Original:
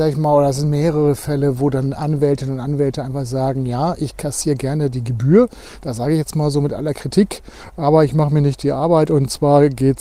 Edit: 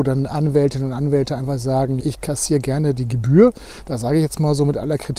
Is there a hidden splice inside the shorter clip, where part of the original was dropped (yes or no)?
yes